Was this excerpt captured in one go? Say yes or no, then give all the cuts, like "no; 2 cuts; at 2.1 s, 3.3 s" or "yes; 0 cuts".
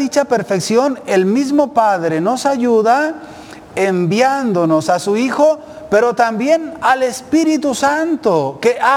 yes; 0 cuts